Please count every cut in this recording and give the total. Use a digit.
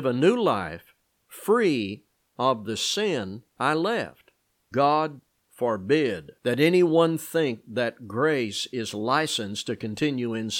2